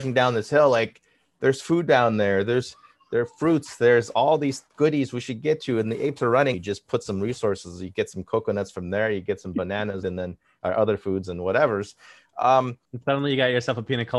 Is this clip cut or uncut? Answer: cut